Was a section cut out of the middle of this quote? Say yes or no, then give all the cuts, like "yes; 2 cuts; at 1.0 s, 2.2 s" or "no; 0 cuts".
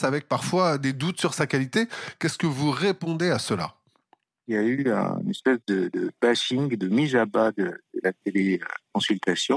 no; 0 cuts